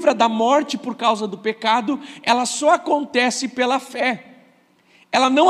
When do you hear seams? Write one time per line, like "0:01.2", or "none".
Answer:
none